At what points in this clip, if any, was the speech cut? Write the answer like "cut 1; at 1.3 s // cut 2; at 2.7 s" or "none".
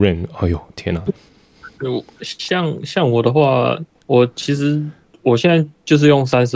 cut 1; at 1.1 s // cut 2; at 3.9 s